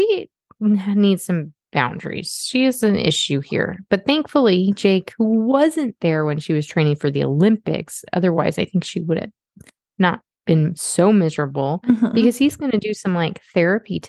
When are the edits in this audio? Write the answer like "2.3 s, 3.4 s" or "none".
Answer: none